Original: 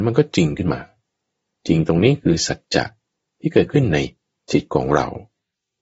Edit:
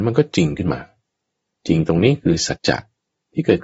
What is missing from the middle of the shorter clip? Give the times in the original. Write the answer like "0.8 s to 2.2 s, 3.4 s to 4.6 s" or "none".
2.6 s to 2.6 s